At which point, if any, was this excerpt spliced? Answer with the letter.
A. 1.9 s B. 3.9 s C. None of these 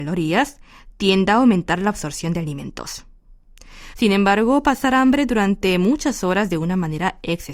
B